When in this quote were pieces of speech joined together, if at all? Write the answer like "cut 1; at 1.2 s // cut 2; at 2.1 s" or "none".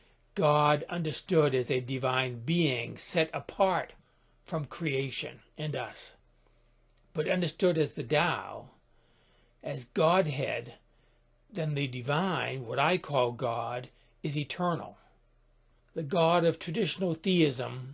cut 1; at 15.8 s